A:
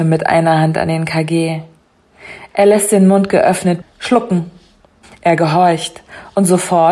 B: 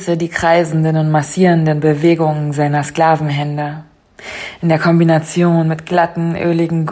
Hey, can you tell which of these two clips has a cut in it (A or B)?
A